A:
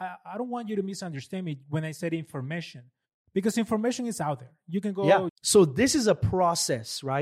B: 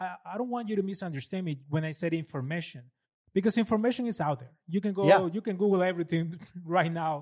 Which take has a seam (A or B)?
A